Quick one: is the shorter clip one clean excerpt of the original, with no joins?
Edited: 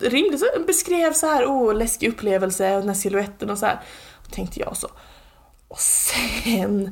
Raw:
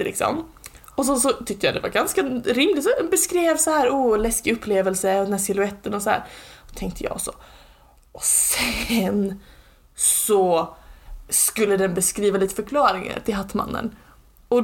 yes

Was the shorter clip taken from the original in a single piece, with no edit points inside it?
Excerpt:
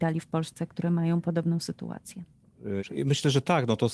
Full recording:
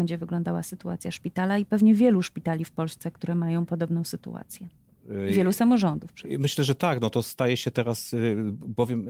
no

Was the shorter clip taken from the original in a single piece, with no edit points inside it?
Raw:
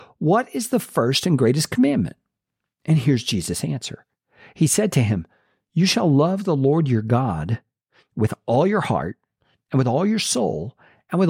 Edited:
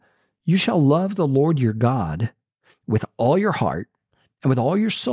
yes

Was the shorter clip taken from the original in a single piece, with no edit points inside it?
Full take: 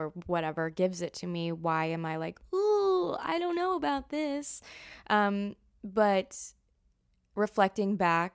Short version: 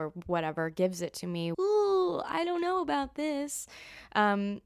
no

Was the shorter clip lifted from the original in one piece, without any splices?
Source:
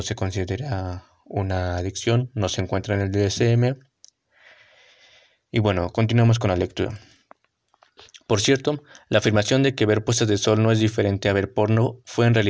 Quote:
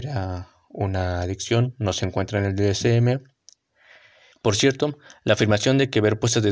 no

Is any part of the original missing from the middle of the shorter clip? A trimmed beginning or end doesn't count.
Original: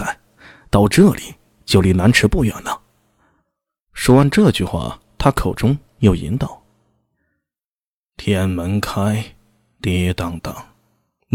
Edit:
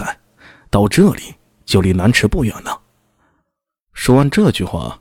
no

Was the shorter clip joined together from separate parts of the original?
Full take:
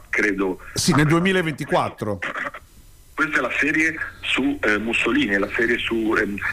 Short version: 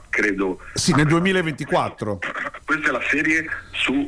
yes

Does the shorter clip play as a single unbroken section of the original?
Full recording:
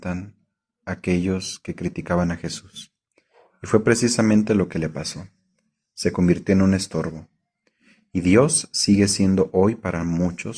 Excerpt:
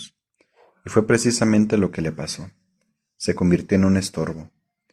yes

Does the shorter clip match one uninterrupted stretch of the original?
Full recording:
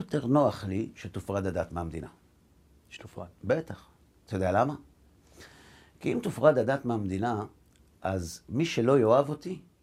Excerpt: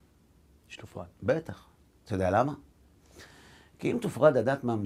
yes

